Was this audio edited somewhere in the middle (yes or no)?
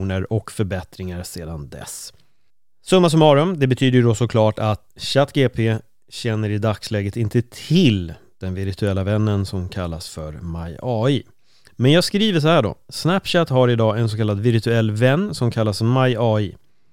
yes